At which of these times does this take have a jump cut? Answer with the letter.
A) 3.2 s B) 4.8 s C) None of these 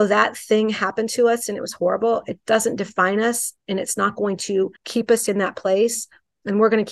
B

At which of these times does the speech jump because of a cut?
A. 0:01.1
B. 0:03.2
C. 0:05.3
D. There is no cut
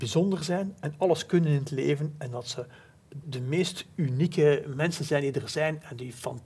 B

